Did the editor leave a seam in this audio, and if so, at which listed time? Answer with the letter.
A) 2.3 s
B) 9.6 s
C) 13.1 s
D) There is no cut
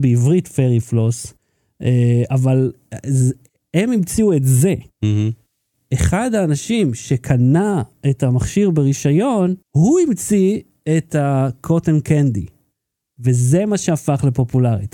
B